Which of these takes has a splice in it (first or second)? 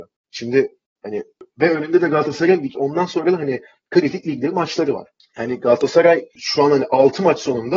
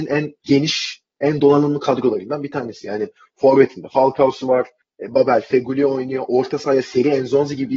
first